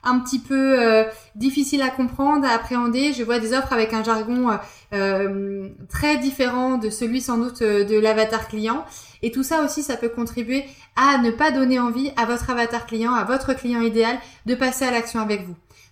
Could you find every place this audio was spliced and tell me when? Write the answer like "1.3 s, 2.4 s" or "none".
9.1 s